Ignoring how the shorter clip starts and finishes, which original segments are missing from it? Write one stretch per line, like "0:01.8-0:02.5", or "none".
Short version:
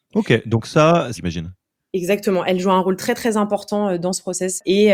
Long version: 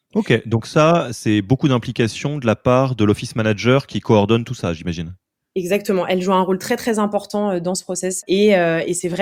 0:01.1-0:04.8